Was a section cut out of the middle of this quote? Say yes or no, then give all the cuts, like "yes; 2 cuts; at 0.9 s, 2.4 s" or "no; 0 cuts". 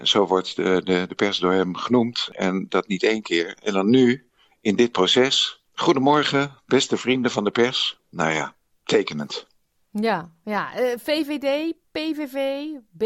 no; 0 cuts